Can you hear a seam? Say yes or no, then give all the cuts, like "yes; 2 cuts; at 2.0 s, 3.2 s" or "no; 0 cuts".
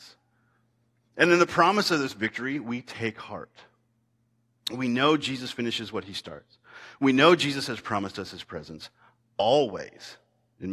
no; 0 cuts